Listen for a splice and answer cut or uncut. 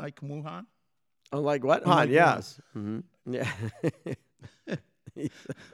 cut